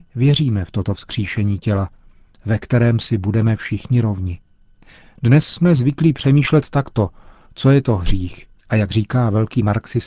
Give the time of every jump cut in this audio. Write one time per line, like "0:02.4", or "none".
0:08.6